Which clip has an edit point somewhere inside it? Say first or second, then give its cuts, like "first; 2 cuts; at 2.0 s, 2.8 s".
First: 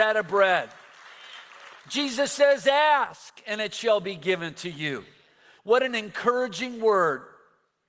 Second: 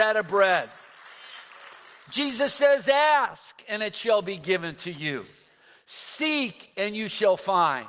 first; 2 cuts; at 1.8 s, 5.6 s